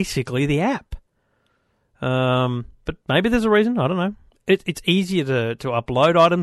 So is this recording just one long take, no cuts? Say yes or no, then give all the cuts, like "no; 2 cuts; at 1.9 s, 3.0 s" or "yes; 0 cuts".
yes; 0 cuts